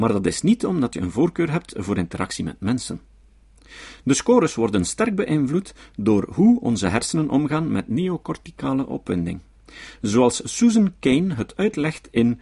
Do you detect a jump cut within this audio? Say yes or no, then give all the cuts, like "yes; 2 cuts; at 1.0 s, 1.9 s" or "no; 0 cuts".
no; 0 cuts